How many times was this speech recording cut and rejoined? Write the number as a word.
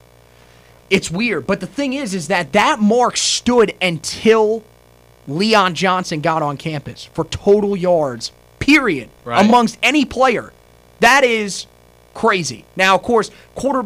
zero